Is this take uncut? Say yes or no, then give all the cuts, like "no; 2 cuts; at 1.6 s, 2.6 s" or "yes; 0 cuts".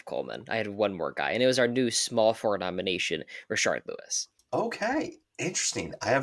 yes; 0 cuts